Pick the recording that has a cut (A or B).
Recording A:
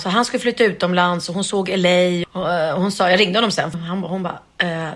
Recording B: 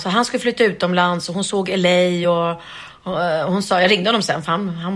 A